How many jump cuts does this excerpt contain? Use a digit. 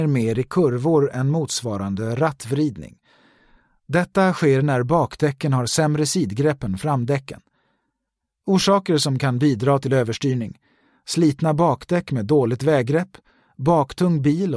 0